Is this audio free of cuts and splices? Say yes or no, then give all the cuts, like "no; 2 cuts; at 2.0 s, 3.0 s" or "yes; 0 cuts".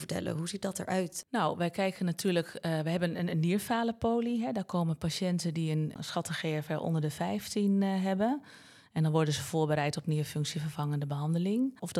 yes; 0 cuts